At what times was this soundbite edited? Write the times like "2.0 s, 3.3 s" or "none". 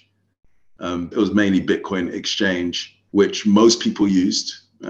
1.1 s, 3.1 s